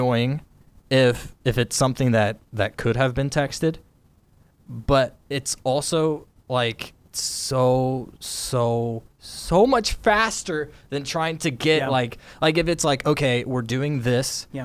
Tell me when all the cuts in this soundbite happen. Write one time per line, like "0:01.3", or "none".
none